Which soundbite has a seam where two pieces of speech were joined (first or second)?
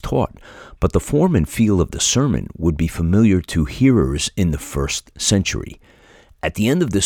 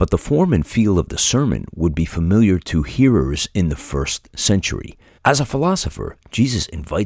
second